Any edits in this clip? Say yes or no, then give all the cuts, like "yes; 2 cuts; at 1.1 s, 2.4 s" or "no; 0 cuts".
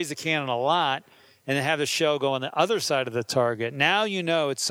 no; 0 cuts